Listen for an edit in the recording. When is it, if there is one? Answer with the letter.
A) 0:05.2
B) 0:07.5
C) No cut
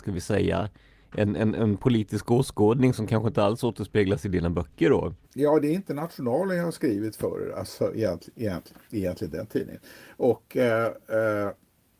A